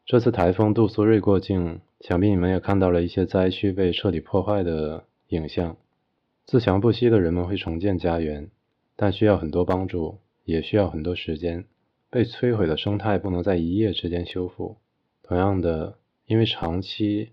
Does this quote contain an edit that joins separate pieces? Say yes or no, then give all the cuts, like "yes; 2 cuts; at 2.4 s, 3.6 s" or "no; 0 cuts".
yes; 1 cut; at 1.9 s